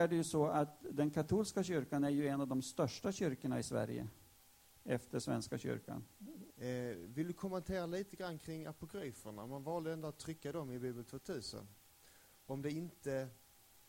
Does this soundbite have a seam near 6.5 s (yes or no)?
yes